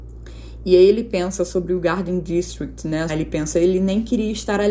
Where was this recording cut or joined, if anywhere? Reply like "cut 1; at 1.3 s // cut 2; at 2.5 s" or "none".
cut 1; at 3.1 s